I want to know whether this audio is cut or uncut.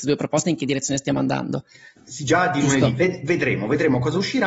cut